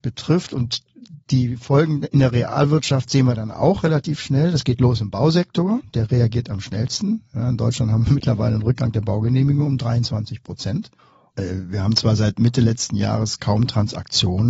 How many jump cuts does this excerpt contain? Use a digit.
1